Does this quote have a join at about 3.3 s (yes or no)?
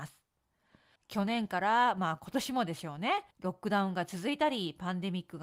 yes